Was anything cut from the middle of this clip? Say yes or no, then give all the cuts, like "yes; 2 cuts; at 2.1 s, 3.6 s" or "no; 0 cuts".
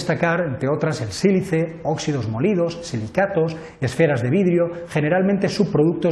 no; 0 cuts